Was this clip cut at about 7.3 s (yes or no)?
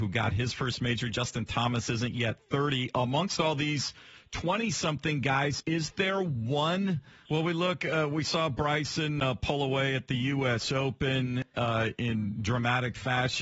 yes